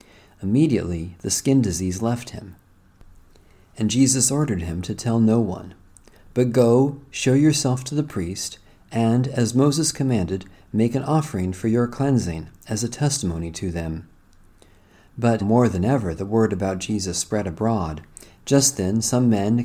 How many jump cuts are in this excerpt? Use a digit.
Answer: 2